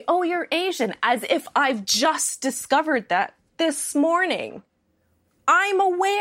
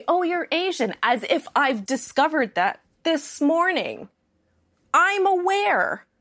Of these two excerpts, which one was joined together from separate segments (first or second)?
second